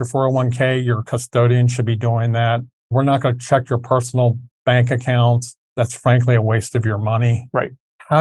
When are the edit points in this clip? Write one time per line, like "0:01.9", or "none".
none